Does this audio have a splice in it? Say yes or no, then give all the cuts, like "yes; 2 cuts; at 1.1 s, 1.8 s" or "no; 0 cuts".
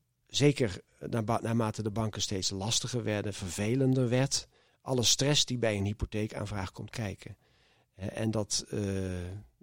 yes; 1 cut; at 4.7 s